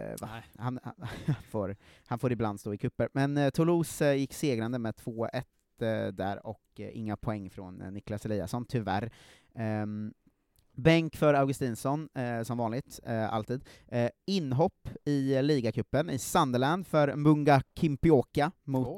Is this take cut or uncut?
uncut